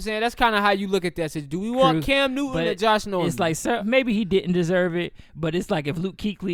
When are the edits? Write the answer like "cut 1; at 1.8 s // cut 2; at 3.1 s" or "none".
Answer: cut 1; at 3.8 s